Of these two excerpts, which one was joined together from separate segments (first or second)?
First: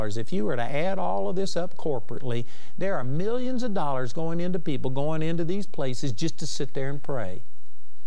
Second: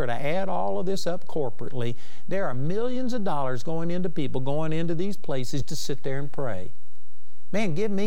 second